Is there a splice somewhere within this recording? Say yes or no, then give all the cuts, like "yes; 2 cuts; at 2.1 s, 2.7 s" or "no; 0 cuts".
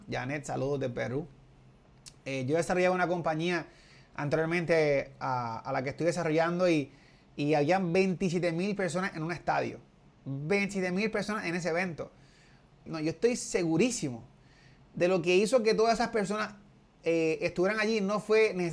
yes; 1 cut; at 12.9 s